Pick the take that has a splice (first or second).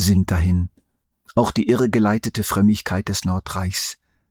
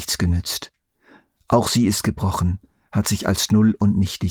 first